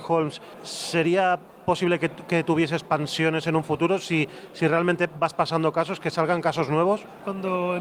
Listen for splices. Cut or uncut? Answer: uncut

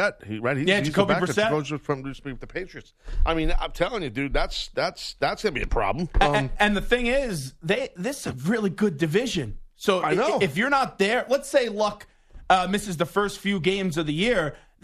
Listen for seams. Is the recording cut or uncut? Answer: uncut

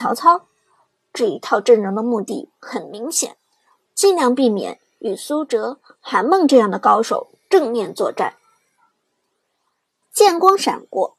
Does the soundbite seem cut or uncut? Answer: cut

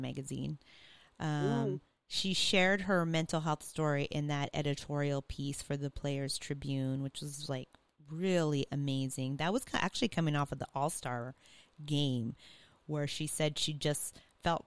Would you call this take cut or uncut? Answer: uncut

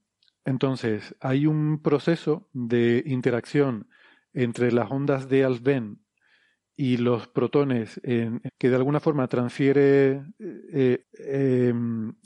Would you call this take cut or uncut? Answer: cut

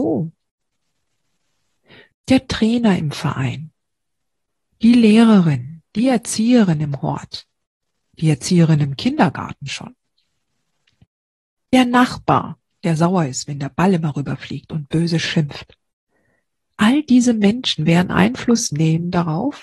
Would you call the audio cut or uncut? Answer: cut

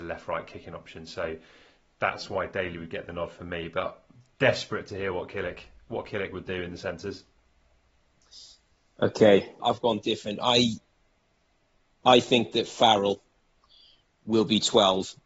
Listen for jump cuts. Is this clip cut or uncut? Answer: cut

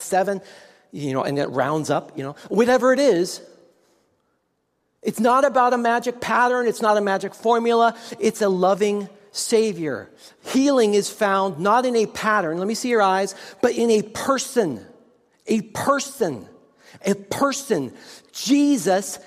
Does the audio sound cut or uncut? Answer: uncut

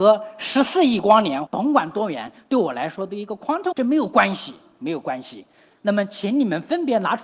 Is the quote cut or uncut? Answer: cut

